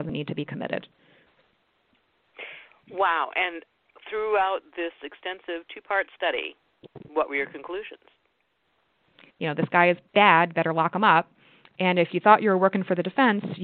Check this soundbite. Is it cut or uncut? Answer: cut